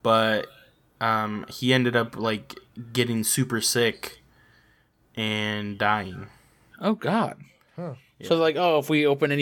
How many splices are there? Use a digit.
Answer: 0